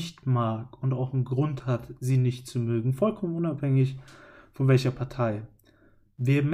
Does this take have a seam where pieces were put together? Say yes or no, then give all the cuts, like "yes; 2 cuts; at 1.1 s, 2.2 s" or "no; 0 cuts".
no; 0 cuts